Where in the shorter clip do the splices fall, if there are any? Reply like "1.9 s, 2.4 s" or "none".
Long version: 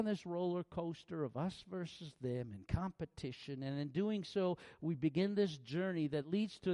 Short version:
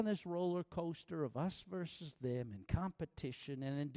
none